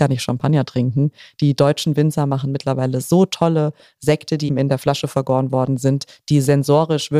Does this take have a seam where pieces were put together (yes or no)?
yes